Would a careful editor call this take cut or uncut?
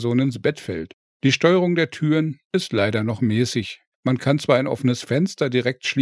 uncut